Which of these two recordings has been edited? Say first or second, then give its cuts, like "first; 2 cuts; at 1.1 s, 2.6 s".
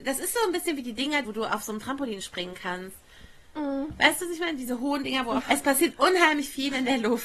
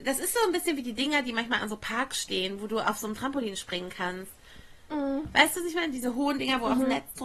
first; 2 cuts; at 1.2 s, 5.4 s